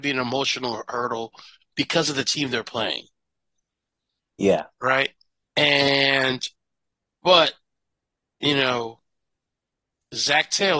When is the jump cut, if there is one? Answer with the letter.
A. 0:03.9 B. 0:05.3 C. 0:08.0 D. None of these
D